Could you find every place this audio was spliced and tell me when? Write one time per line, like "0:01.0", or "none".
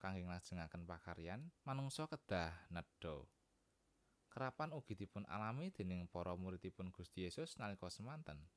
0:01.6